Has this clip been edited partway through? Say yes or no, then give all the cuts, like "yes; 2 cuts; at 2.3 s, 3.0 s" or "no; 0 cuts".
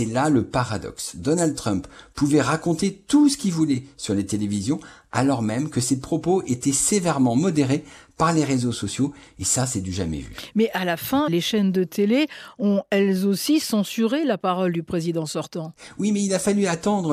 yes; 1 cut; at 11.3 s